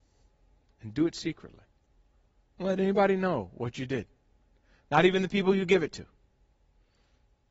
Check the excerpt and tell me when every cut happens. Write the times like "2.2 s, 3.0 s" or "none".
none